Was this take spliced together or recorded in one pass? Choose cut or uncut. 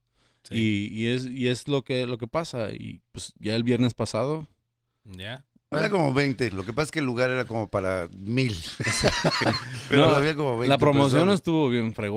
cut